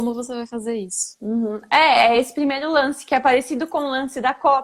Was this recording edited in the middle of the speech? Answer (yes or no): no